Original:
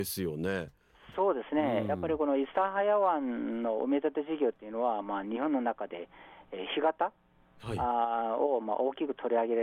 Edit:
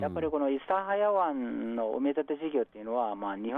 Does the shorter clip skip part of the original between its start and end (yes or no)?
no